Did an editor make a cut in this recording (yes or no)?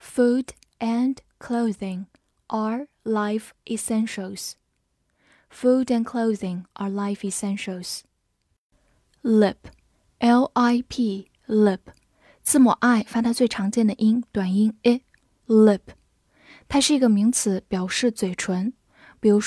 no